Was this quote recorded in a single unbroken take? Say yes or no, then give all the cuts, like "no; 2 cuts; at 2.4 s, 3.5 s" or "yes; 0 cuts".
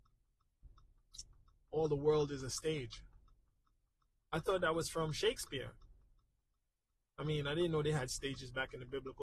yes; 0 cuts